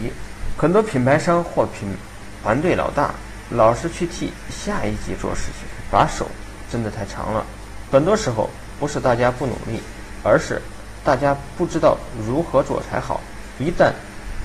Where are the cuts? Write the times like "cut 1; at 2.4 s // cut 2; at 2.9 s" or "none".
cut 1; at 7.9 s // cut 2; at 10.2 s